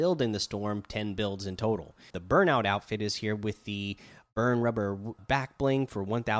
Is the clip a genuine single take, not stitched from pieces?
no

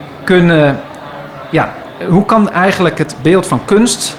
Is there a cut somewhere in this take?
no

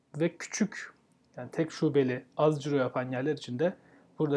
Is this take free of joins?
yes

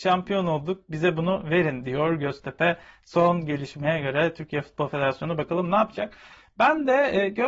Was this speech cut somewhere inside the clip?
no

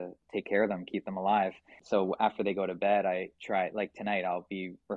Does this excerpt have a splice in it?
no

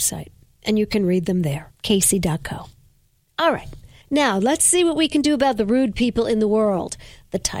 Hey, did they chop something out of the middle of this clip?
yes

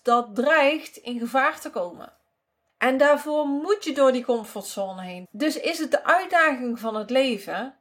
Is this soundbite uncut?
no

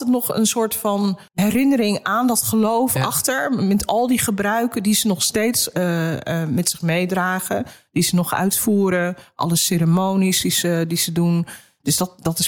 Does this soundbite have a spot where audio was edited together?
yes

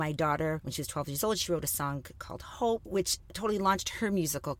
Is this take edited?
no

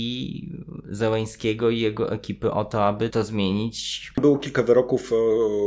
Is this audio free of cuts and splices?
no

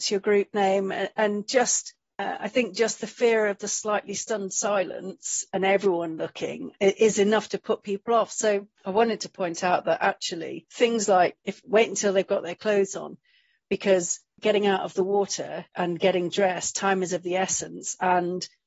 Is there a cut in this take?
yes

